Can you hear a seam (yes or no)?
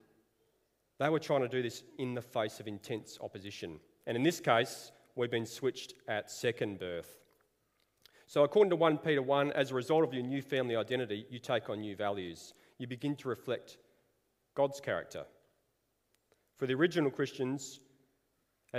yes